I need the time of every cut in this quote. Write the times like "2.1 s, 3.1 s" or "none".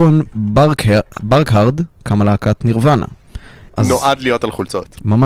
3.7 s